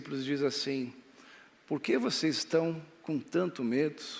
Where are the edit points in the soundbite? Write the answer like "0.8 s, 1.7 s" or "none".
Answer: none